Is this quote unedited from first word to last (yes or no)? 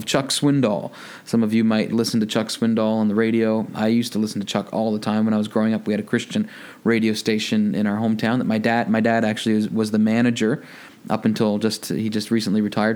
yes